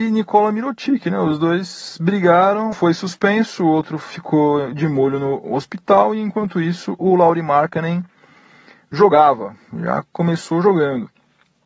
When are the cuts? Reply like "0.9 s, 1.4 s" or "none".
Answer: 2.7 s